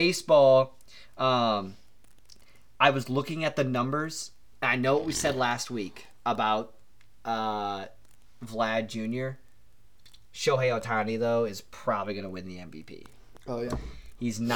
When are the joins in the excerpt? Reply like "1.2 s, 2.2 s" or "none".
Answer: none